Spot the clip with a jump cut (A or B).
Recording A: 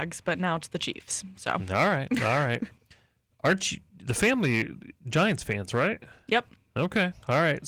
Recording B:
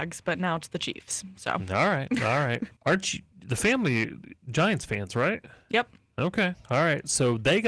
B